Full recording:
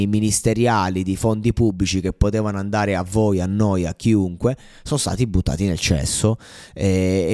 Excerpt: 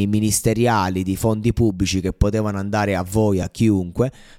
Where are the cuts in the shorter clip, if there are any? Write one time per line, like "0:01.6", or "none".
0:03.4

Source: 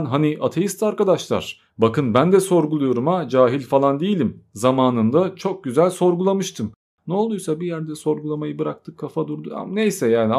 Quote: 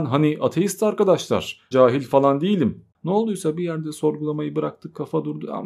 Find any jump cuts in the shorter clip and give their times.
0:01.7
0:02.9

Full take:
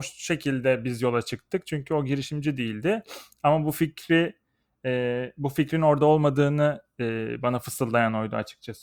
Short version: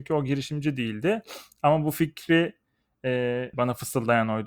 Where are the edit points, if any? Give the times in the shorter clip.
0:03.5

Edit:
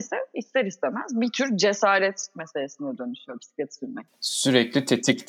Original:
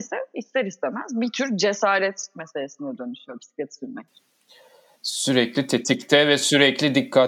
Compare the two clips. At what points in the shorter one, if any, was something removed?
0:04.1

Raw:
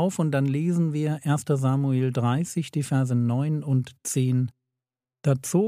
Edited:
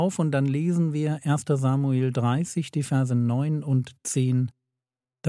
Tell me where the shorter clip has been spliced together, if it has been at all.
none

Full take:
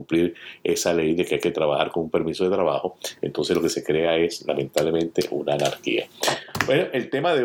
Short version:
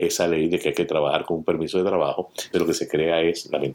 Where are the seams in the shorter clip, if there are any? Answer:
0:02.5

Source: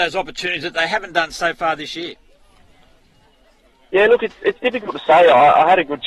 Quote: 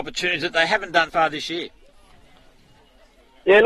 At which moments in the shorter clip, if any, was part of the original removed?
0:01.1

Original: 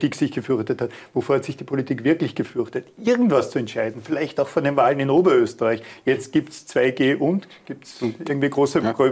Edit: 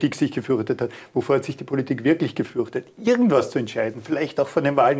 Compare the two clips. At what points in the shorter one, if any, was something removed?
none

